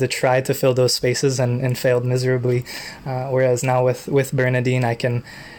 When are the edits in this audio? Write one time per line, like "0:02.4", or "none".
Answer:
none